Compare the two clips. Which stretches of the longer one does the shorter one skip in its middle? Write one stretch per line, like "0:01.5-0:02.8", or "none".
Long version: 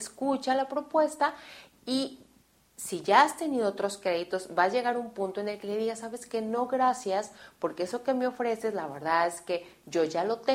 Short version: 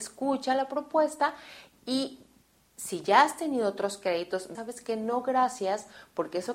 0:04.5-0:06.0